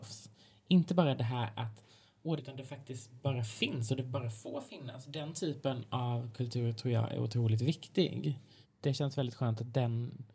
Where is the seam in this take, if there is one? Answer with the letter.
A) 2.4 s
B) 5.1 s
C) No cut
A